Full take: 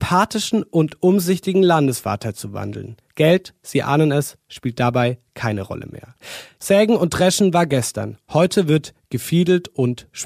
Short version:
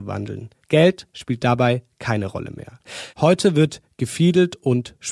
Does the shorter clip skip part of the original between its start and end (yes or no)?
yes